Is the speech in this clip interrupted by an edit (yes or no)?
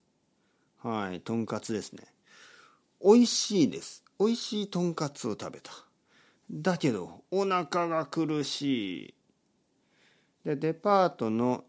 yes